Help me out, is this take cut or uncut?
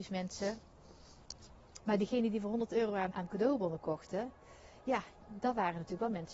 cut